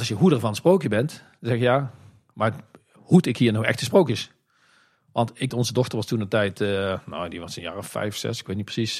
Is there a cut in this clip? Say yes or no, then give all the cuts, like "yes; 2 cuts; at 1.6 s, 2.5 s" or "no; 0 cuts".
yes; 1 cut; at 5.5 s